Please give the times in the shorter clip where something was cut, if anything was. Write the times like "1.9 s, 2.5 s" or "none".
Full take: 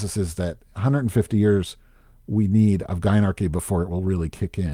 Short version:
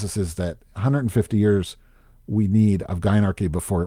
none